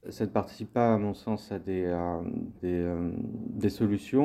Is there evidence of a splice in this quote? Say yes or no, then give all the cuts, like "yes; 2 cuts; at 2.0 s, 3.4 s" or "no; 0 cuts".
yes; 1 cut; at 2.5 s